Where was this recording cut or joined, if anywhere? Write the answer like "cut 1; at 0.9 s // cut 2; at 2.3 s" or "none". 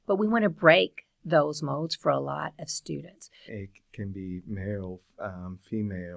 cut 1; at 3.5 s